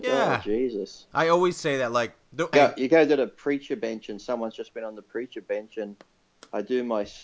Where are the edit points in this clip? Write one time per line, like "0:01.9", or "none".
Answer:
0:02.5